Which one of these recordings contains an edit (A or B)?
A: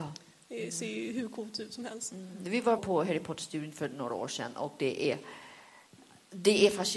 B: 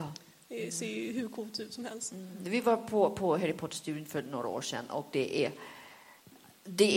A